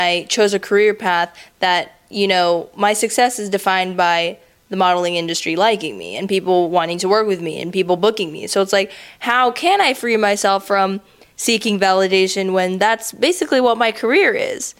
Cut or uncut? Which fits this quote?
uncut